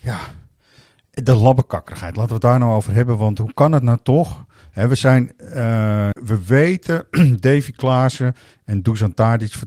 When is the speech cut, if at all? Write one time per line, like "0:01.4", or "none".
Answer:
0:06.1